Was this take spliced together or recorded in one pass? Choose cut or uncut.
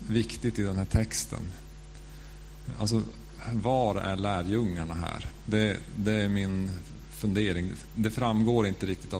cut